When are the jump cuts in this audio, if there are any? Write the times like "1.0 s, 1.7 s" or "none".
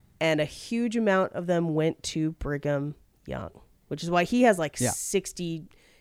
none